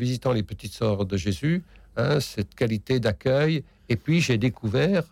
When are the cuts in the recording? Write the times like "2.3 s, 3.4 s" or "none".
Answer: none